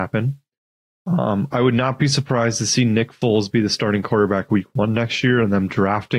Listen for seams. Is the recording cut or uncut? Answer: uncut